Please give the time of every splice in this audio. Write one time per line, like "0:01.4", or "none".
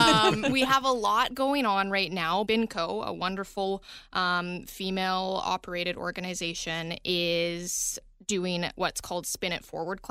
0:02.5